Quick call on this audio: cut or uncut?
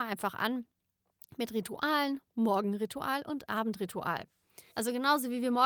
cut